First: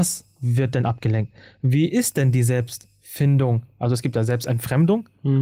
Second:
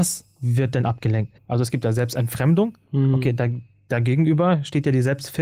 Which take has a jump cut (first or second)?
second